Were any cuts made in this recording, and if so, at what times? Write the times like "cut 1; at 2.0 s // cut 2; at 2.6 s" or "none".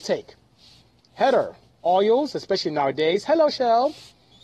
cut 1; at 1.7 s